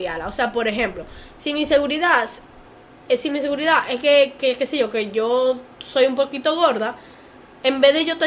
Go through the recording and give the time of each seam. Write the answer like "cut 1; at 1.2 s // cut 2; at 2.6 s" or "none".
none